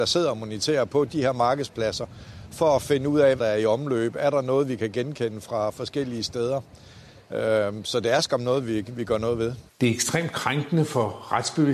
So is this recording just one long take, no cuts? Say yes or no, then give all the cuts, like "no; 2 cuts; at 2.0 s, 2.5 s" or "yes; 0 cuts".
no; 1 cut; at 3.4 s